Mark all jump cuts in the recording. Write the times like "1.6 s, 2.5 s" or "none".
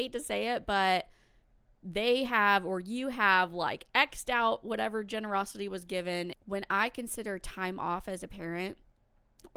6.3 s